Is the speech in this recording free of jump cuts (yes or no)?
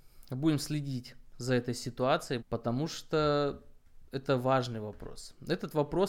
no